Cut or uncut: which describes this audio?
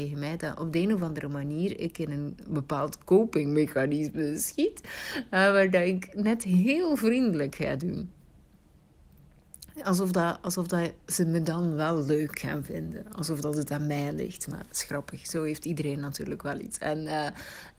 uncut